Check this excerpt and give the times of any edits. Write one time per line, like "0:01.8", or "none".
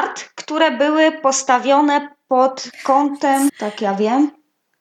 0:03.5